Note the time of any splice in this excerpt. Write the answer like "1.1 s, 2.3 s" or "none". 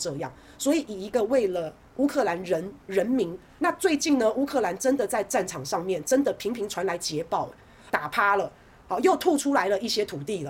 3.6 s, 7.9 s